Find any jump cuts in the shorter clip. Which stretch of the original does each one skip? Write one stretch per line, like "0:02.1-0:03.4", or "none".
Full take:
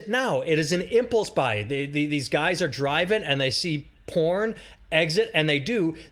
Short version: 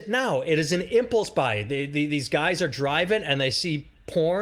none

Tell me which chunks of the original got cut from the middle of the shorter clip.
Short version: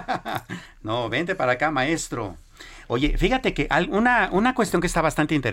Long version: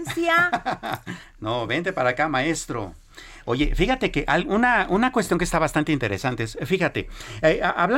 none

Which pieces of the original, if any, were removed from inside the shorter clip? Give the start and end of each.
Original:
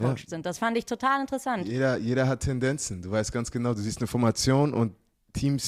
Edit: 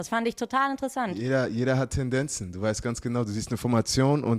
none

